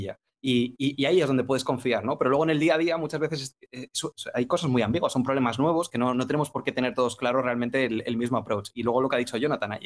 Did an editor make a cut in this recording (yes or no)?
no